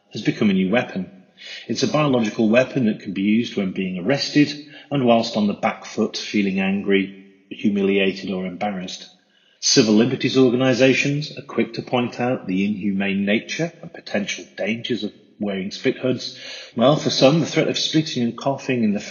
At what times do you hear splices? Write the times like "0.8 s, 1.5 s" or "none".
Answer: 9.6 s, 16.7 s